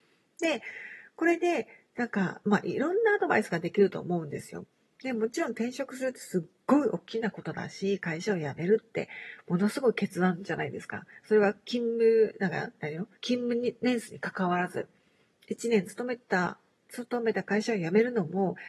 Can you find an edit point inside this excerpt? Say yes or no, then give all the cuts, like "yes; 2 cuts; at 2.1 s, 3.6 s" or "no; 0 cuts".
yes; 1 cut; at 13.2 s